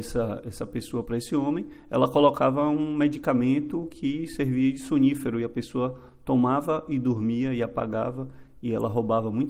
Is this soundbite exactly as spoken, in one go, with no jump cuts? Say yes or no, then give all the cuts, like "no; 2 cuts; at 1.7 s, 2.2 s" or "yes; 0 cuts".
yes; 0 cuts